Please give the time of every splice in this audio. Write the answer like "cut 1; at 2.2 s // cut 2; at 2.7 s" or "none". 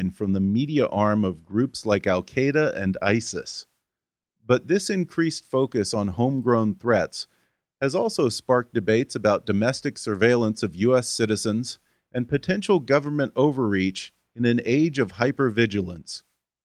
none